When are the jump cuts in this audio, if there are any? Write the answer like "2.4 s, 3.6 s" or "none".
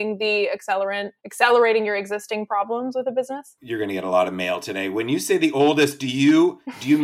1.2 s